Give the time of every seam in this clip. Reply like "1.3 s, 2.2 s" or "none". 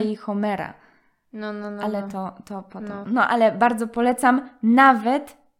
3.0 s